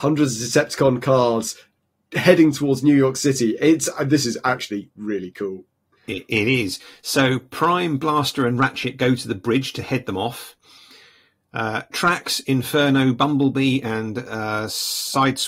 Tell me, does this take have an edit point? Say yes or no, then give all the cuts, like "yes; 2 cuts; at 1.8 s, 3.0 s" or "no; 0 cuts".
no; 0 cuts